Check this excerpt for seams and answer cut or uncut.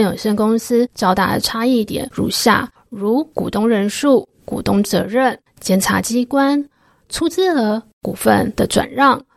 cut